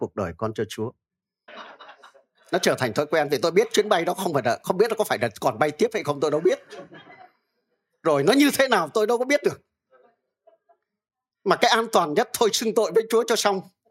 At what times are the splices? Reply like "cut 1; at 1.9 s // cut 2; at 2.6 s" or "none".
cut 1; at 1.5 s